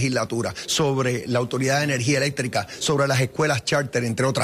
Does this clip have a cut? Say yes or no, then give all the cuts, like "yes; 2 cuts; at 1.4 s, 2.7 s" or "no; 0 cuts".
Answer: no; 0 cuts